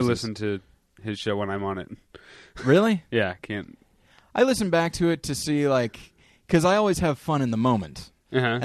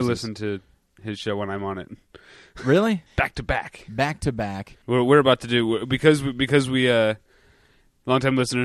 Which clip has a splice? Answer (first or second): second